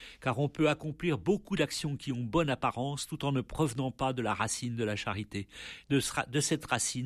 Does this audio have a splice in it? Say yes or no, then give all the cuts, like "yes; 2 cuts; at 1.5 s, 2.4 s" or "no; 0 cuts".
yes; 1 cut; at 5.8 s